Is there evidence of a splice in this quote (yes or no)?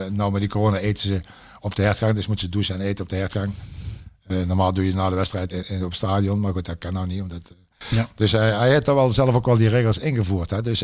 yes